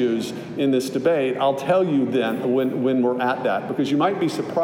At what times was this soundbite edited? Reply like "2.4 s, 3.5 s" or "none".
none

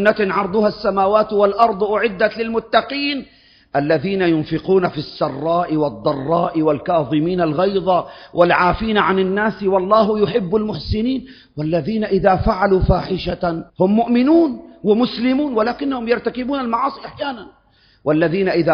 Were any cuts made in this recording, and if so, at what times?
13.7 s

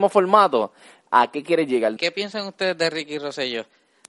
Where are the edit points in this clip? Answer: 2.0 s

